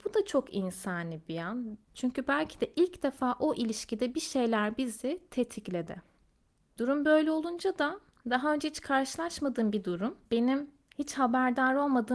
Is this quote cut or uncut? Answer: cut